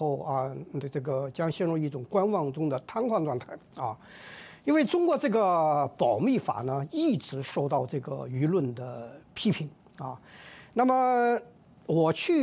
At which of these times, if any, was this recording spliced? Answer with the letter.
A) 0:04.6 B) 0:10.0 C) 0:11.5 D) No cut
D